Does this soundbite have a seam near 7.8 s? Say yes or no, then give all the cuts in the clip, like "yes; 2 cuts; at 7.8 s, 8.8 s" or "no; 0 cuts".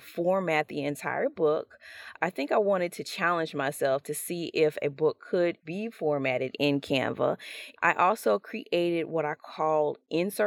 yes; 2 cuts; at 5.6 s, 7.8 s